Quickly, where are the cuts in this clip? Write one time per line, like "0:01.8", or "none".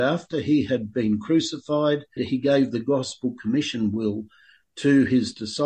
0:02.2